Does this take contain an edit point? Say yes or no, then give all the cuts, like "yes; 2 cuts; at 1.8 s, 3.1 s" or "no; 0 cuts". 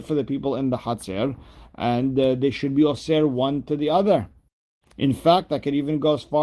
no; 0 cuts